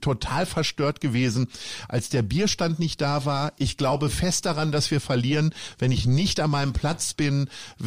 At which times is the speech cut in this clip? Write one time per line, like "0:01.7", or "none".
none